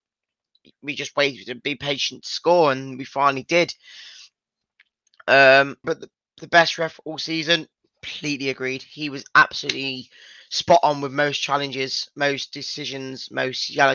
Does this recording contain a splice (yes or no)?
yes